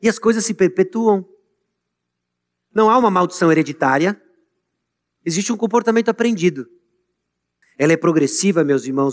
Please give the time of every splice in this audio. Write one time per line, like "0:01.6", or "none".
0:07.6